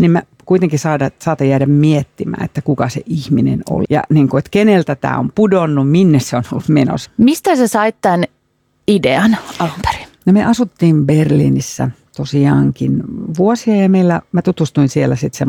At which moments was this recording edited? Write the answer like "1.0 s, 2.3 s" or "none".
3.8 s, 7.1 s